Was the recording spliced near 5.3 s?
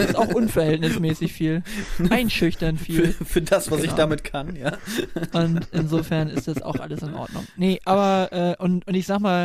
yes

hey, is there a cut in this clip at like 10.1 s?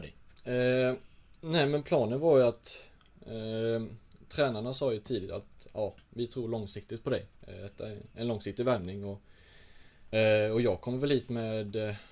no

